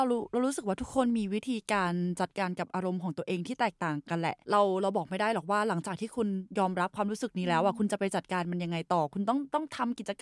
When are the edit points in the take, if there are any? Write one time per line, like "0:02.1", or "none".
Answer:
0:04.4